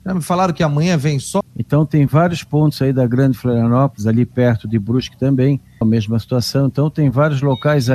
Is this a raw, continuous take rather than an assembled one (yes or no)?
no